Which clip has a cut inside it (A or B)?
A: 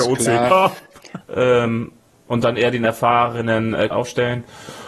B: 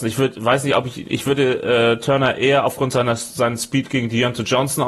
A